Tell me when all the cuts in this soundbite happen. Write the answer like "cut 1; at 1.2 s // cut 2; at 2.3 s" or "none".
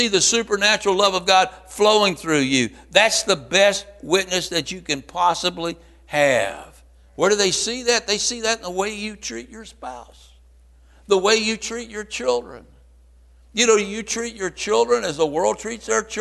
none